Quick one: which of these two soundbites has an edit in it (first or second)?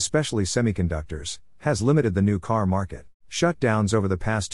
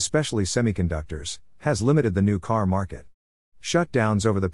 first